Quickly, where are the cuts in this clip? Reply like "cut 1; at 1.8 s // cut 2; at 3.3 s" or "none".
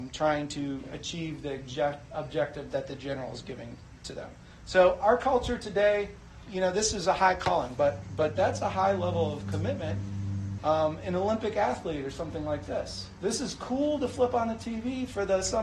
cut 1; at 6.5 s // cut 2; at 7.8 s // cut 3; at 10.6 s